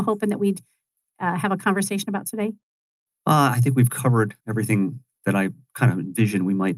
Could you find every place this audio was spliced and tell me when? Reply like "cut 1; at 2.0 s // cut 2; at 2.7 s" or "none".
cut 1; at 3.1 s // cut 2; at 4.4 s